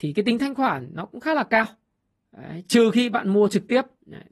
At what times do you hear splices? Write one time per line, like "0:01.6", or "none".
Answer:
none